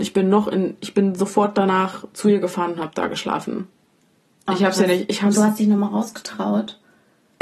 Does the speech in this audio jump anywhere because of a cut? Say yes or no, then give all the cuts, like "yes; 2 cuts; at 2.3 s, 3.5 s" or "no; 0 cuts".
no; 0 cuts